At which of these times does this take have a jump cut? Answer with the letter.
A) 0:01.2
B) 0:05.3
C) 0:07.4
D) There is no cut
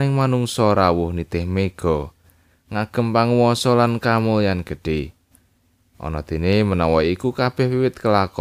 D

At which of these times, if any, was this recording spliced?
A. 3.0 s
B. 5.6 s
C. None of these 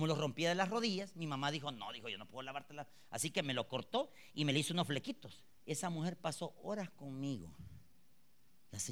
B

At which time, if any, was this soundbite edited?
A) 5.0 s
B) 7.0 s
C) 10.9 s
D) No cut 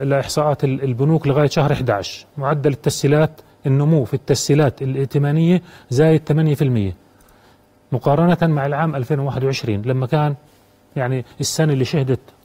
D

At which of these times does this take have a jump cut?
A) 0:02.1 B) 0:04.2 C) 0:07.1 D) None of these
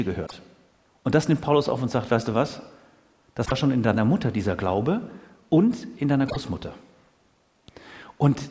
D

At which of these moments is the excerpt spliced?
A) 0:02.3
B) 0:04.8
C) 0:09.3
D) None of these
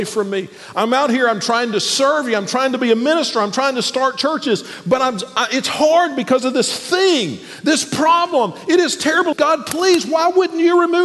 C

